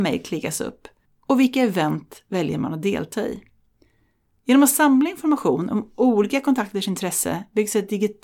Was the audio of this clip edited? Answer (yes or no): yes